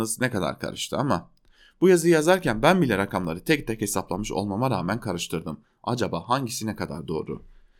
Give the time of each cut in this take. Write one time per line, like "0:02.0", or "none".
none